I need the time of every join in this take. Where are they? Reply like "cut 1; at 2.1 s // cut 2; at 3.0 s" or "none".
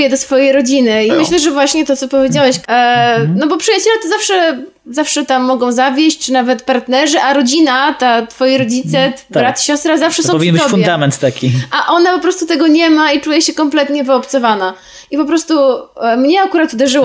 cut 1; at 1.1 s // cut 2; at 2.6 s